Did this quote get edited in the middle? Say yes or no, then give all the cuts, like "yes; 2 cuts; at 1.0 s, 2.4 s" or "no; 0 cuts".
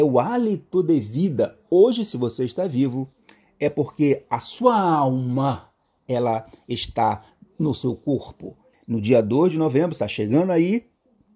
yes; 1 cut; at 8.7 s